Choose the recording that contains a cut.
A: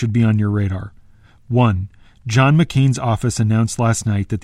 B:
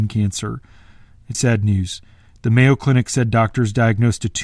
B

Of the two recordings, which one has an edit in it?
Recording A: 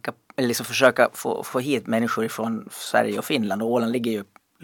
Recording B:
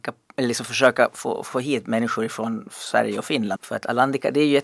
B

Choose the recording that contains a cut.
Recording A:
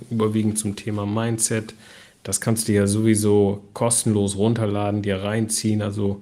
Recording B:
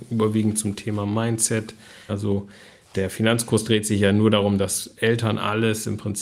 B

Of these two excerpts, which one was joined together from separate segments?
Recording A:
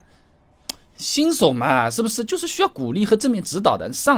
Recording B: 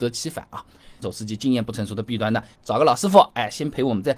B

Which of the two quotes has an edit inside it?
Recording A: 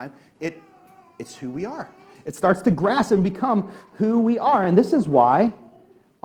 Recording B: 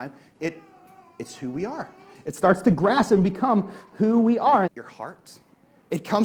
B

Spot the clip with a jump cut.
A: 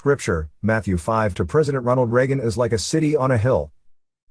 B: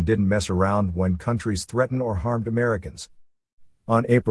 A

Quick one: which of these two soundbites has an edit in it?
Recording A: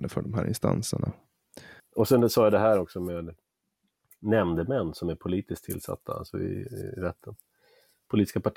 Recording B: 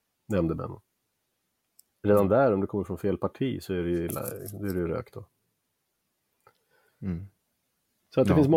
A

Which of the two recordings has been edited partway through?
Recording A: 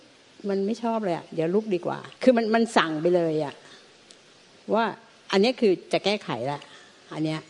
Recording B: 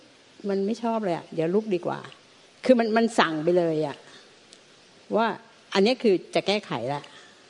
A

